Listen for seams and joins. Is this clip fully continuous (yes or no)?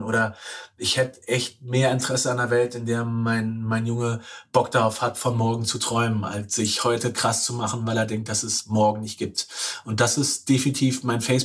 yes